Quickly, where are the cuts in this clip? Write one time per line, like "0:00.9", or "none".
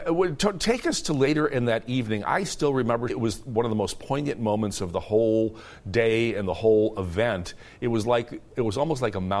0:03.1